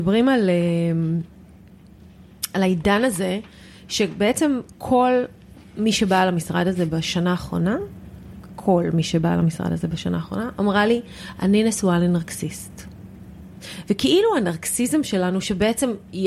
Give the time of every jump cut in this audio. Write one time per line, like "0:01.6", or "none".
0:13.8